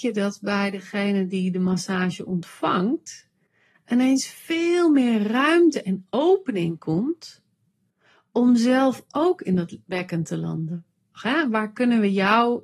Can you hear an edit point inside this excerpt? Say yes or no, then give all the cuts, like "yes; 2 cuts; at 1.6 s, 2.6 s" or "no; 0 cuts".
yes; 1 cut; at 11.1 s